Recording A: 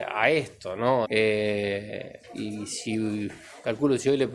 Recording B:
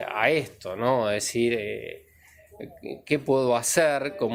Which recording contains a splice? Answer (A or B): A